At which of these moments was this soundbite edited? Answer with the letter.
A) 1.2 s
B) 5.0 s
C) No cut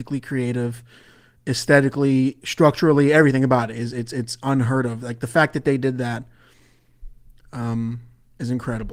C